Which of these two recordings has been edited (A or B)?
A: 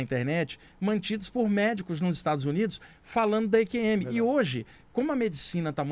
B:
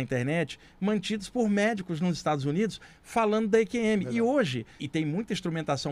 B